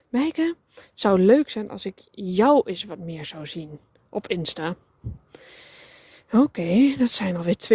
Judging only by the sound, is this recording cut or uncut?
uncut